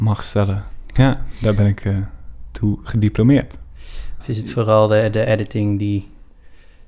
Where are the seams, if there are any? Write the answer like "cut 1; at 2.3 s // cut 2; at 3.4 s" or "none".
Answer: cut 1; at 1.0 s // cut 2; at 4.2 s